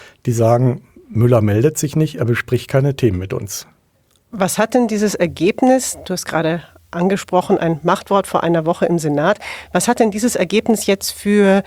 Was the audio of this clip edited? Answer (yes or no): no